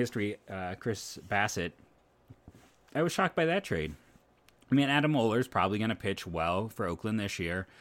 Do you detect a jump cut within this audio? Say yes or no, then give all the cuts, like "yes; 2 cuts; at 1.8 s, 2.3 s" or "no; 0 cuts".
no; 0 cuts